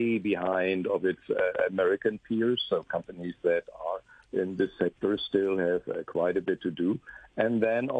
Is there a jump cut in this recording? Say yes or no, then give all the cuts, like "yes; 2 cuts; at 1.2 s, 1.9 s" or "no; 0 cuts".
no; 0 cuts